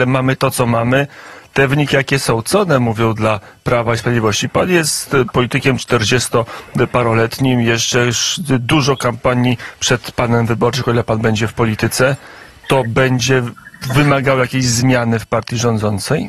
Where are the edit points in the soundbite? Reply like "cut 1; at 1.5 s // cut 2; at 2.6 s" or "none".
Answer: none